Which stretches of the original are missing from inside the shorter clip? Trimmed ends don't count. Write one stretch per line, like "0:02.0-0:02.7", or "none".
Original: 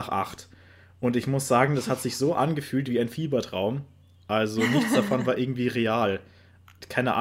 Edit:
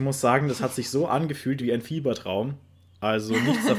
none